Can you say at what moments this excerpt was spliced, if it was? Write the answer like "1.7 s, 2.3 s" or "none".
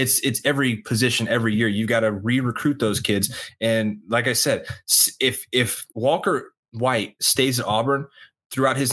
5.9 s